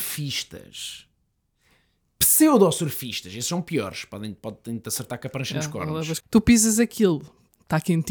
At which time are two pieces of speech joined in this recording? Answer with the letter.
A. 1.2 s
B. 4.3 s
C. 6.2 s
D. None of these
C